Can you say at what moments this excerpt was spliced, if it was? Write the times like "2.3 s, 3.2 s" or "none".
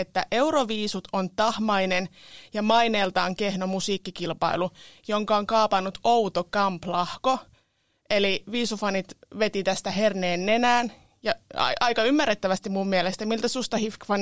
none